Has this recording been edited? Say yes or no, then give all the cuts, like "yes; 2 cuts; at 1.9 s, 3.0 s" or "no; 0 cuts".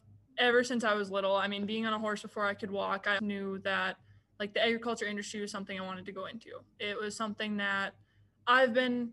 yes; 1 cut; at 3.2 s